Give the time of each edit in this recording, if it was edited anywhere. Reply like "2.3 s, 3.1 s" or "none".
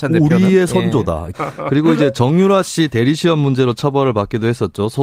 1.3 s